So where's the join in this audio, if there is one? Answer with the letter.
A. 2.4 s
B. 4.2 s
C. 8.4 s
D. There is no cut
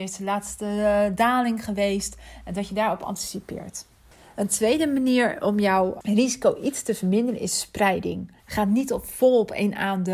C